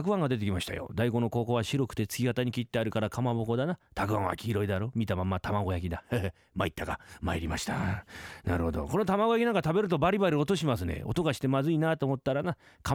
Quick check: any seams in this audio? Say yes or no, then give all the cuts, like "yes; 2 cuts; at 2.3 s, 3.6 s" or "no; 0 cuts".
no; 0 cuts